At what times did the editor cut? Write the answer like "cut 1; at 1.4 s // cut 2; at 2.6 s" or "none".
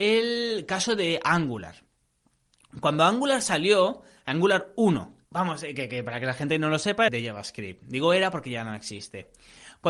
cut 1; at 5.2 s // cut 2; at 7.1 s

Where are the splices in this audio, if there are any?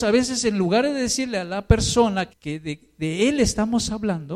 cut 1; at 2.3 s

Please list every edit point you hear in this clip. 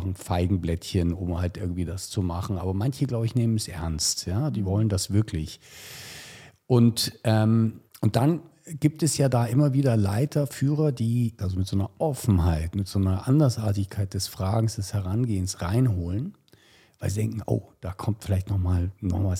cut 1; at 7.9 s // cut 2; at 11.4 s

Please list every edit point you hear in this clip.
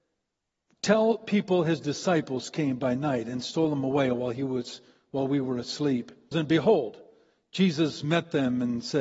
cut 1; at 6.3 s

